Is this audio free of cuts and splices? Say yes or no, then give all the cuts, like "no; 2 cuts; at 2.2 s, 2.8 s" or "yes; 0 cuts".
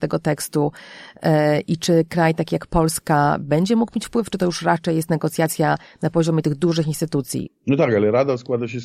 no; 1 cut; at 7.5 s